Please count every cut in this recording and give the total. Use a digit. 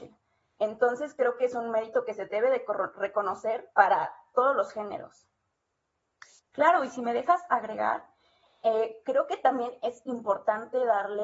2